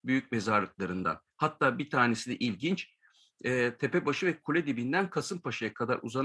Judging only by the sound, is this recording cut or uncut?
uncut